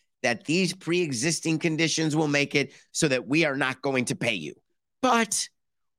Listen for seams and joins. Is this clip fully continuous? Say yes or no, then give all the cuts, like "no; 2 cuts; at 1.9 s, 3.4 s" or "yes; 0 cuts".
yes; 0 cuts